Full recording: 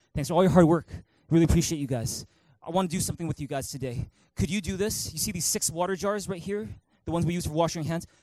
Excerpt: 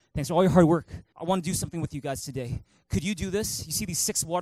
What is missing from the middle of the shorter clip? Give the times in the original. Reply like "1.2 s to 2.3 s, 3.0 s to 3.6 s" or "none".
1.1 s to 2.6 s